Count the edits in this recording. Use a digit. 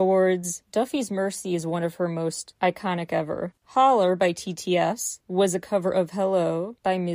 1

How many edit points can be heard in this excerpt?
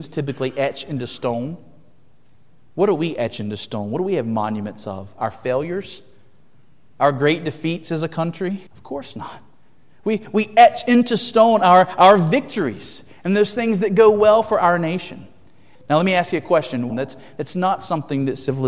3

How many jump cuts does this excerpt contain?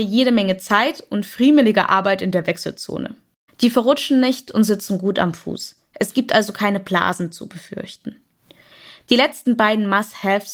1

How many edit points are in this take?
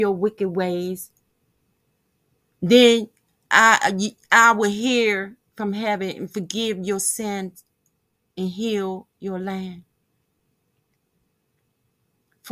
0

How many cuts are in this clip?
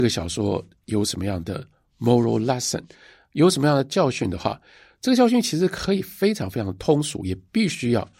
0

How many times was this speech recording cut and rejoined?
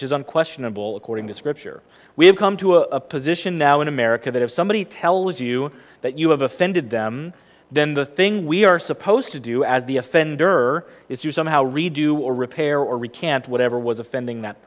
1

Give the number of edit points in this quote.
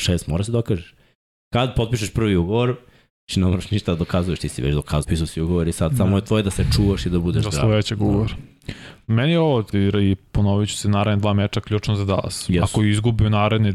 2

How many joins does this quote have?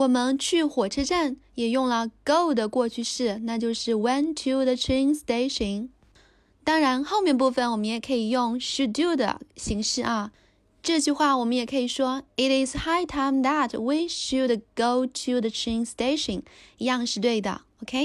0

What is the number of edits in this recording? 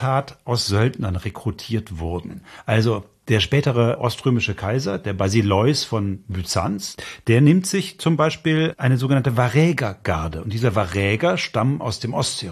0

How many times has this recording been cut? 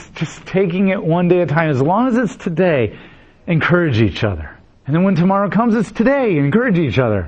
1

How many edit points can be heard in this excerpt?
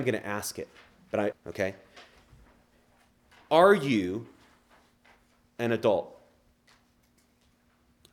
1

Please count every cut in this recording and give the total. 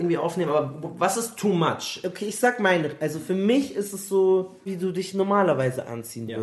1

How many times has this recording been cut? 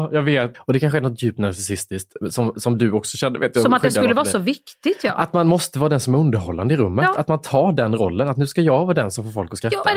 0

